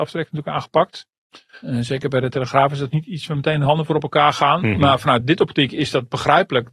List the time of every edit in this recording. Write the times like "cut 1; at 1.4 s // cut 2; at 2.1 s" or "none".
none